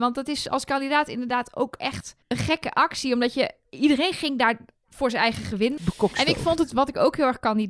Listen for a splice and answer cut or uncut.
cut